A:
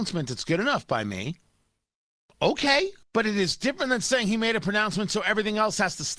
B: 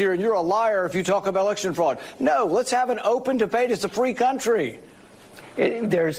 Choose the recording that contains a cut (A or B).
A